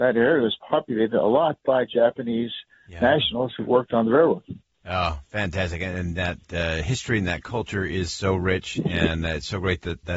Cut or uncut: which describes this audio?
uncut